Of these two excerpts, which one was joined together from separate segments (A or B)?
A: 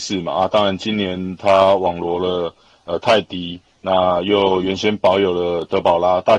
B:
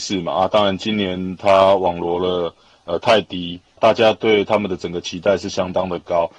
B